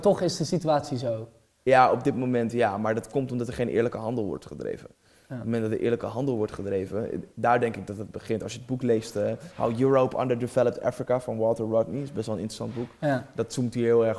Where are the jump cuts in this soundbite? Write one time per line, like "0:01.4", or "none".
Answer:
none